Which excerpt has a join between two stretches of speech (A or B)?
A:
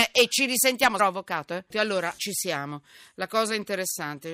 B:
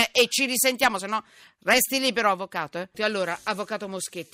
A